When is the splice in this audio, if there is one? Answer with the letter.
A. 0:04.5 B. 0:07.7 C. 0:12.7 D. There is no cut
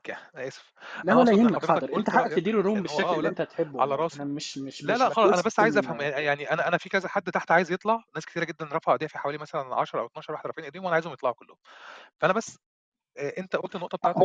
A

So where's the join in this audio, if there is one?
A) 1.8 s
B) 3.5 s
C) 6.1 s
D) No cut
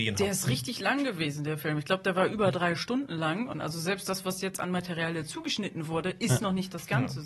B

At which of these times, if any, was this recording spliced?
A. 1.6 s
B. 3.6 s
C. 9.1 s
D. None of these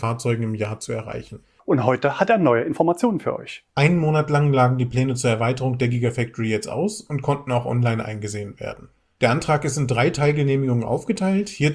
A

